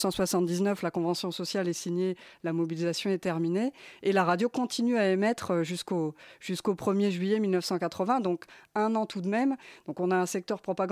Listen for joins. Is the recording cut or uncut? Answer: uncut